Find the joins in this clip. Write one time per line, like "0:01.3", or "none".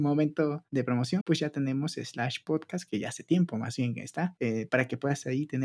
0:01.2